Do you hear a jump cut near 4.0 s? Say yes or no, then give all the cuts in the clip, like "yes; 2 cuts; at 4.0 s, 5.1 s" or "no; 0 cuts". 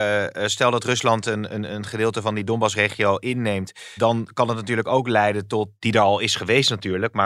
yes; 2 cuts; at 4.0 s, 5.8 s